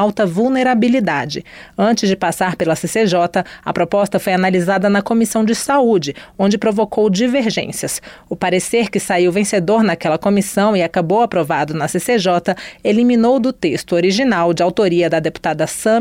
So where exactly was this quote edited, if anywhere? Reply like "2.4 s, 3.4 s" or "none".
none